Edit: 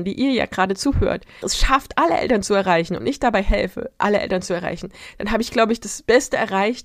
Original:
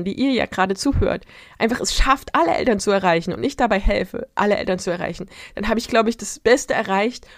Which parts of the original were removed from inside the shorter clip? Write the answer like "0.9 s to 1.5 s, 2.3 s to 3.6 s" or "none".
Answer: 1.4 s to 1.8 s